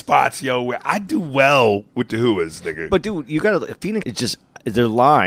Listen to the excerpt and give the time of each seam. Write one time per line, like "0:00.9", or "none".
0:01.9
0:04.0